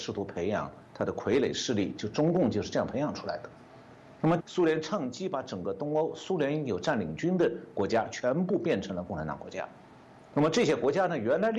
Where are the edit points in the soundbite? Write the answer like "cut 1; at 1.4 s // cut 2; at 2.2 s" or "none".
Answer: cut 1; at 4.4 s